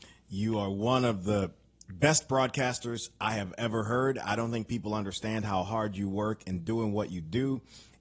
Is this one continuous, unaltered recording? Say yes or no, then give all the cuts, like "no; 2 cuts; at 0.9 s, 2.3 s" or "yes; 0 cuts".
yes; 0 cuts